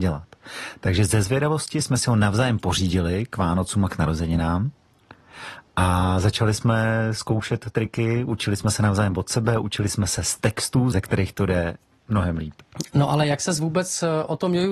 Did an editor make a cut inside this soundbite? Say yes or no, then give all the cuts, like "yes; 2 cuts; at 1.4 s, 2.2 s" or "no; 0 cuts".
yes; 1 cut; at 10.9 s